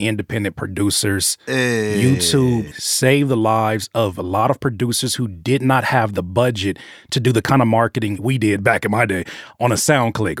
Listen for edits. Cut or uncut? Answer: cut